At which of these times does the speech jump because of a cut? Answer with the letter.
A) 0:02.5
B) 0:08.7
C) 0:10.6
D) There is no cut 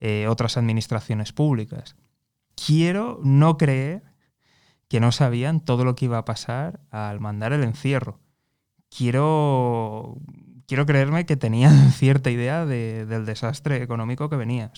A